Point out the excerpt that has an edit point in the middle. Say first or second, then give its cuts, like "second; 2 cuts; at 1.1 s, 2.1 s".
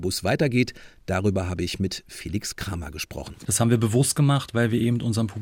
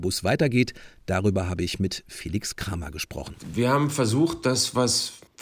first; 1 cut; at 3.4 s